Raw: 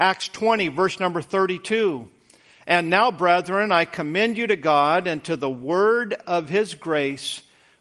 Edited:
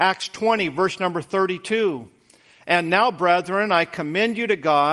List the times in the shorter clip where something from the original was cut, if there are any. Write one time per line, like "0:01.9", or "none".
none